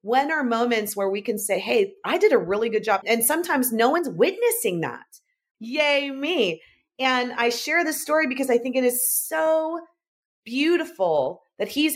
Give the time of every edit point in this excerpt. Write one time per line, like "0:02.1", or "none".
0:05.5